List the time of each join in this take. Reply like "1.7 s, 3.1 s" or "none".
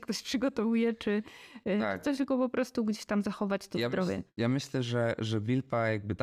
none